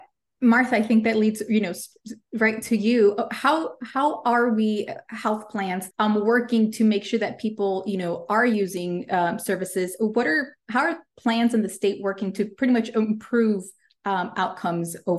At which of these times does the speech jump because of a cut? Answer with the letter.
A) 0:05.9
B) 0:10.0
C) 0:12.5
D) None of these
A